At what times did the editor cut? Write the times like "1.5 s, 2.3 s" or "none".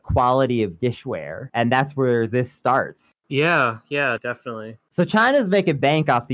4.2 s